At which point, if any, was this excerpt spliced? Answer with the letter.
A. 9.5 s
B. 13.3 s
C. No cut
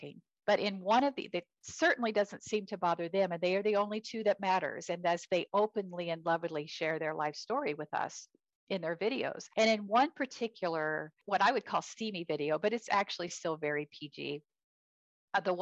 C